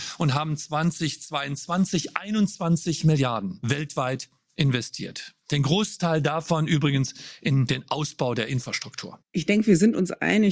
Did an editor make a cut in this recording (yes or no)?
yes